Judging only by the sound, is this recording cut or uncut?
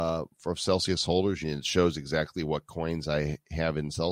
cut